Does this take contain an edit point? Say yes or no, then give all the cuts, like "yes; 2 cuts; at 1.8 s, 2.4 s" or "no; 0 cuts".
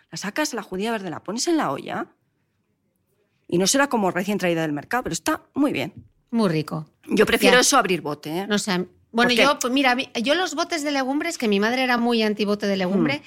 no; 0 cuts